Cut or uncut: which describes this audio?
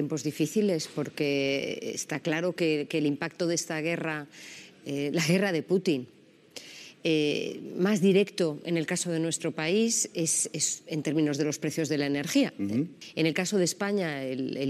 uncut